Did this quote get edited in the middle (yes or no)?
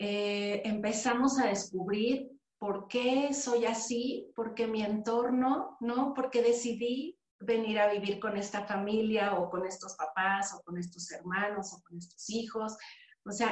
no